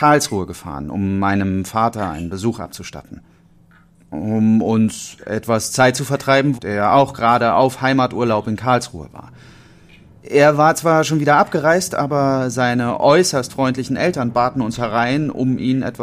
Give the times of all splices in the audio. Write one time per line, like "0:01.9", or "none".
0:06.5